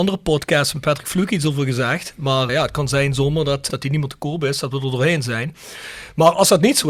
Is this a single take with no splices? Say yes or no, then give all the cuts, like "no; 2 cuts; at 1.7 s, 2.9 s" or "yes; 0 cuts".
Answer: no; 2 cuts; at 2.5 s, 3.7 s